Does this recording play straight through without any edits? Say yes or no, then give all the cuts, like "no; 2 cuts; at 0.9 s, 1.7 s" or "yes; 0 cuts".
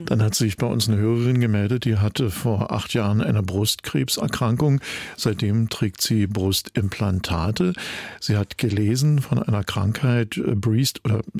yes; 0 cuts